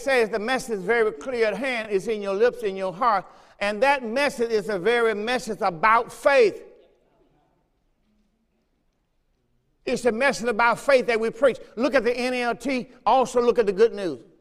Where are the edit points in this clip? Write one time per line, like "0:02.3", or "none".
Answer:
none